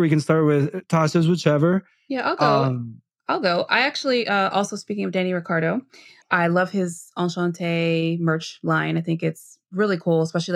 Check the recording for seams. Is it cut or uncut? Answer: cut